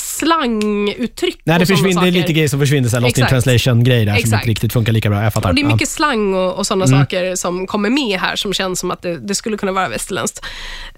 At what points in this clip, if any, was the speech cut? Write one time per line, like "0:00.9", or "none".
none